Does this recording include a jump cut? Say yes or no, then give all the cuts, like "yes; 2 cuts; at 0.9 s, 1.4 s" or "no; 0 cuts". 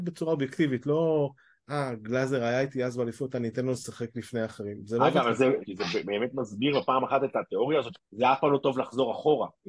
yes; 2 cuts; at 5.6 s, 7.9 s